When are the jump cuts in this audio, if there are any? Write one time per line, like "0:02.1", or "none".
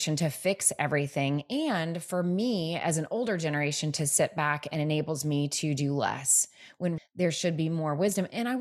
0:07.0